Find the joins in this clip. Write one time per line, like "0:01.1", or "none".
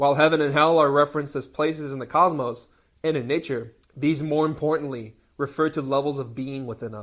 0:03.8